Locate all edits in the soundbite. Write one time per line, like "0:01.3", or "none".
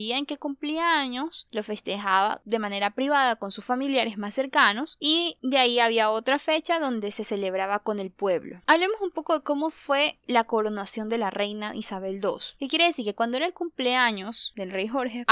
0:12.6